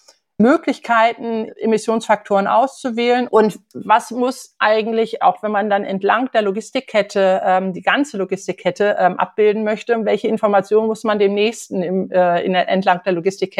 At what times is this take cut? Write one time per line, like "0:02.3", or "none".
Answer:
0:03.3